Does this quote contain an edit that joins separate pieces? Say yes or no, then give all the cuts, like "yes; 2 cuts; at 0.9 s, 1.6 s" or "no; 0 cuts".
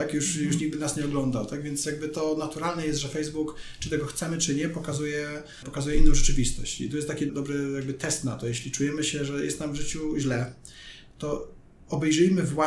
yes; 1 cut; at 7.3 s